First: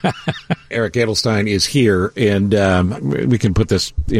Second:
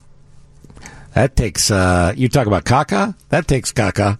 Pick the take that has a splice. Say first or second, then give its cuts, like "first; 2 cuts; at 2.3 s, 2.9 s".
first; 1 cut; at 2.9 s